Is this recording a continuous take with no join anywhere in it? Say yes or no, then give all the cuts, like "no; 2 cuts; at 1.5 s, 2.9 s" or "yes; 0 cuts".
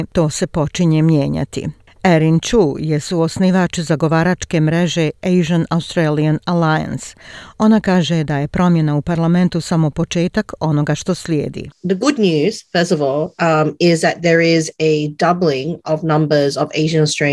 yes; 0 cuts